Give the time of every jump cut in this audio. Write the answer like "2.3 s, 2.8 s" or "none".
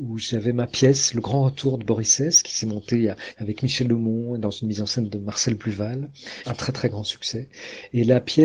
3.3 s, 6.4 s